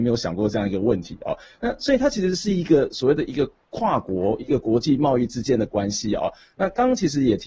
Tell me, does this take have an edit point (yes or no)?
no